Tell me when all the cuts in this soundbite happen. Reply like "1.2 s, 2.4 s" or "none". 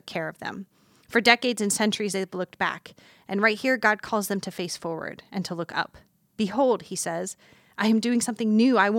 none